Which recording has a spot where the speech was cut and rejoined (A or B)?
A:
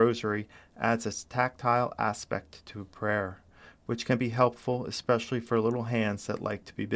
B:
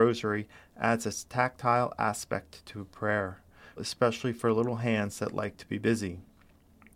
B